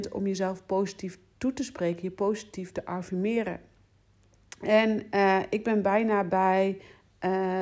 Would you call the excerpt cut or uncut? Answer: uncut